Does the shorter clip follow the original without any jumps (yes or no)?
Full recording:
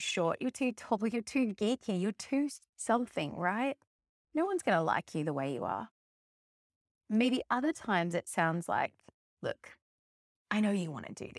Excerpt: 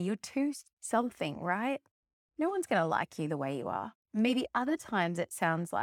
no